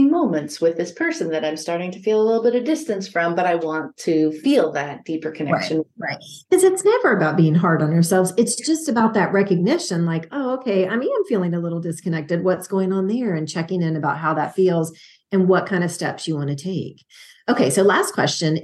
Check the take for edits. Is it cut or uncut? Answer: uncut